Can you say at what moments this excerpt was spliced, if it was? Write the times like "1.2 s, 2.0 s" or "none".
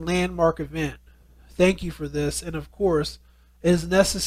none